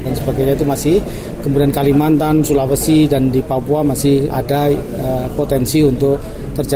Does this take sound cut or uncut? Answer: cut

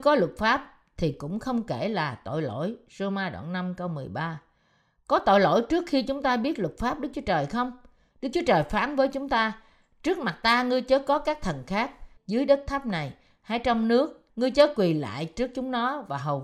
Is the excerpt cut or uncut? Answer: cut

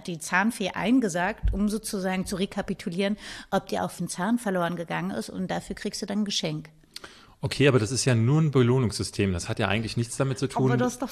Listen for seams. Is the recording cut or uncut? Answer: cut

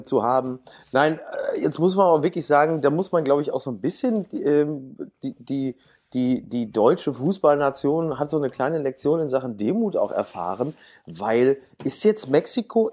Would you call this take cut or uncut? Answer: uncut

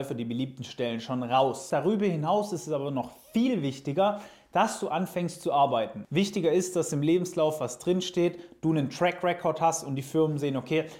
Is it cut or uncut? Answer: cut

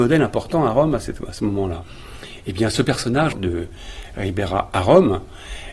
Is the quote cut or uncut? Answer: cut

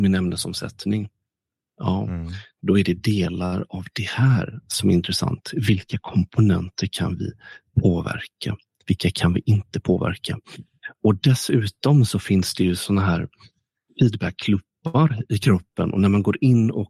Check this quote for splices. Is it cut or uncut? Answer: uncut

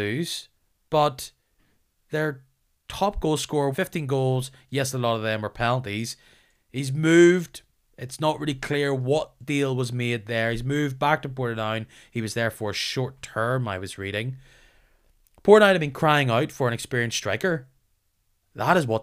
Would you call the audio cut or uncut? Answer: cut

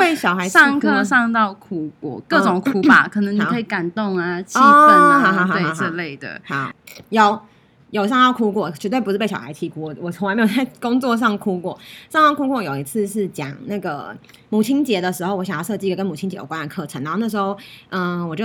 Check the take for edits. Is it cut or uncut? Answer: uncut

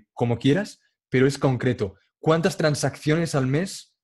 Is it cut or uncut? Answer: uncut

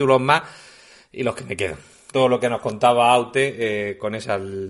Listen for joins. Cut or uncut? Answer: cut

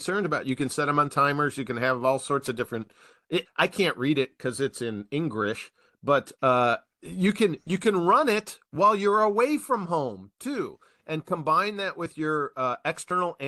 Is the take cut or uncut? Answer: cut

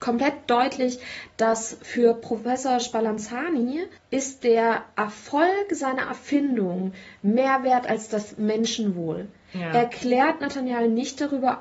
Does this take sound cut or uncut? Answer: cut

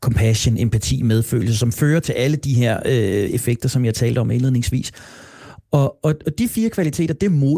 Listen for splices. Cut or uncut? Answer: uncut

